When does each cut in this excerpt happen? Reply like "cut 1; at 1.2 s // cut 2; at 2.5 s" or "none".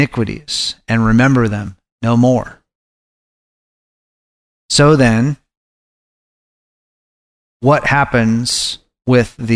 none